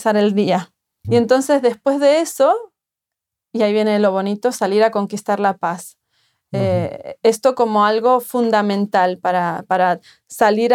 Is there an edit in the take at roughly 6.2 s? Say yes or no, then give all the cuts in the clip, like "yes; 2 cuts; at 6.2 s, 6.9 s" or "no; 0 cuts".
no; 1 cut; at 1.0 s